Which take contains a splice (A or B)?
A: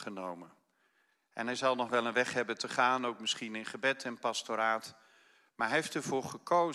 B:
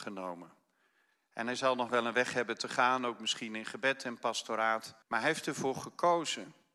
B